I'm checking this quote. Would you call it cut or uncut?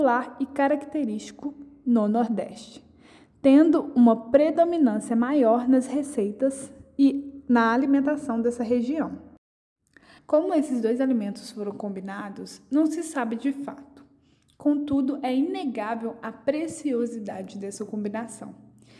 cut